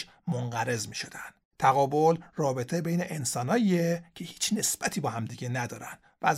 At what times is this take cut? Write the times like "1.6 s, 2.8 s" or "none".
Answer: none